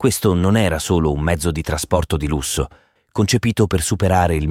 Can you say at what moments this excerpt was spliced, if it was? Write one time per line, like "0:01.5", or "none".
0:03.0